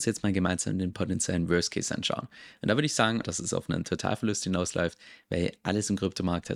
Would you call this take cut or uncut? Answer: cut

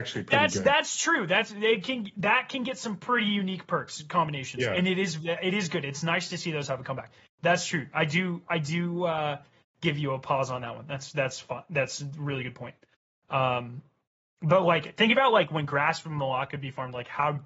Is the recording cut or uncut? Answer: uncut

